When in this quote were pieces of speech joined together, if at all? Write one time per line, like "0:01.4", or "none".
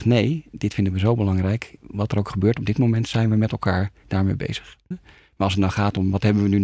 0:04.9